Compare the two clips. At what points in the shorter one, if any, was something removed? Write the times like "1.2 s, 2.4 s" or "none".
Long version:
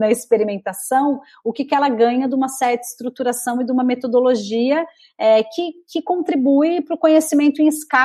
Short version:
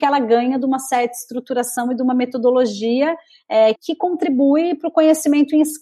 3.7 s